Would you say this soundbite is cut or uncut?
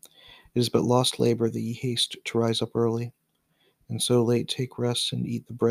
uncut